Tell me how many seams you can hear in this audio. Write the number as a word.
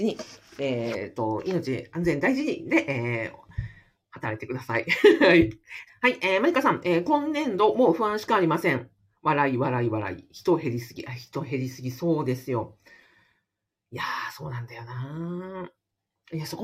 one